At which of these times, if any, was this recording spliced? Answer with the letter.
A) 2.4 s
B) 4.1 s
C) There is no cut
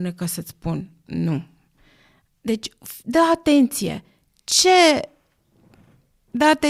C